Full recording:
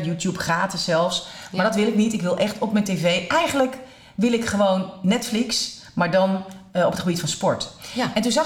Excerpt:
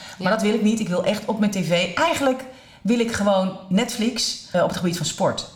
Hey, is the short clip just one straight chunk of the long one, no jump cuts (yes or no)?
no